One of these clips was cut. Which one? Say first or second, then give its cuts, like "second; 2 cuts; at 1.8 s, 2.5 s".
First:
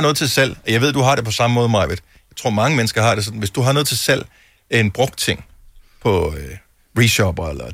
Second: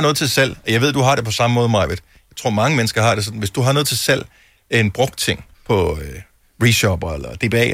second; 1 cut; at 5.5 s